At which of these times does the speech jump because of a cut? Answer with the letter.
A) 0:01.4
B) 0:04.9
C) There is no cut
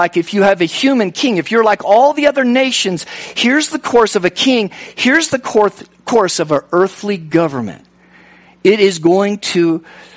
C